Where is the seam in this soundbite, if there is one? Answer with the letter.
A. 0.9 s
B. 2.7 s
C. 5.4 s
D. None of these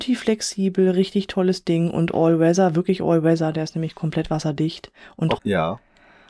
C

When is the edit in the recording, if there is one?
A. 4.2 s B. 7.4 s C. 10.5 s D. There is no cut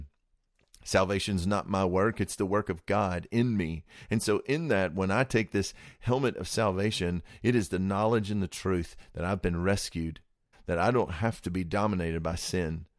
C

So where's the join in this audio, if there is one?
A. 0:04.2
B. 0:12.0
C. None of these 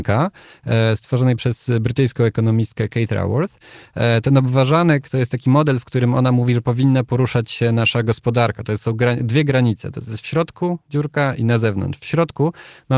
C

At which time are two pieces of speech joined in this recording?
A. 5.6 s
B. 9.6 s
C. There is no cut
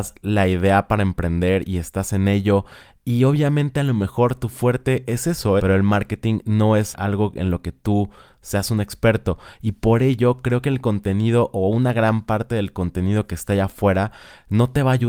A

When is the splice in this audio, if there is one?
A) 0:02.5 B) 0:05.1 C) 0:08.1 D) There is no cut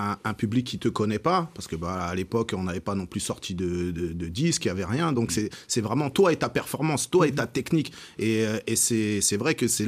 D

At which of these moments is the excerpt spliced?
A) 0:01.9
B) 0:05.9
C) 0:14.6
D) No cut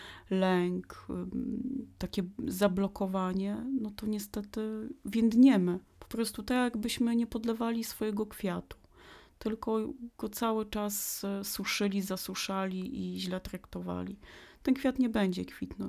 B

